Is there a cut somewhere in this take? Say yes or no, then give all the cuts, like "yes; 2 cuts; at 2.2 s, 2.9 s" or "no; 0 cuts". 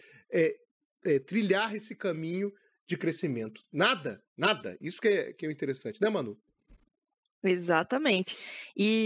no; 0 cuts